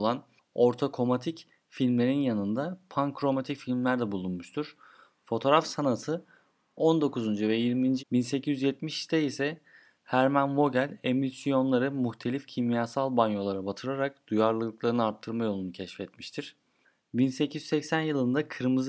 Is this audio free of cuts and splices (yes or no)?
no